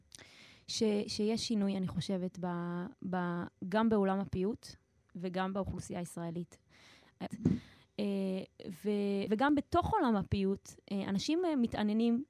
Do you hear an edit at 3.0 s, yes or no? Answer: no